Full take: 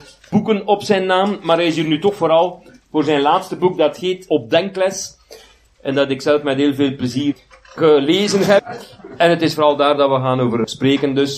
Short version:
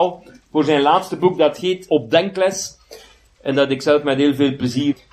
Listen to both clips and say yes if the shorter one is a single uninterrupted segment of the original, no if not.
yes